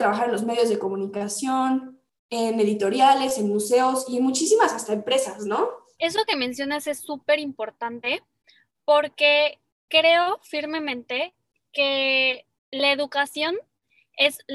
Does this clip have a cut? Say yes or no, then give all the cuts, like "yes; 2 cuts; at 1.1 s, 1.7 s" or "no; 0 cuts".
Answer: yes; 1 cut; at 5.9 s